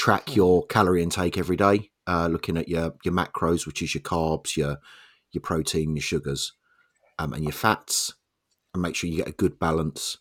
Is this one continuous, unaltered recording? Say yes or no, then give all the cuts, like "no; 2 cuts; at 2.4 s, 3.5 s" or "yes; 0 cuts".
yes; 0 cuts